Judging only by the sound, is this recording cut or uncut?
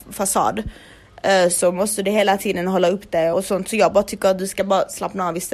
cut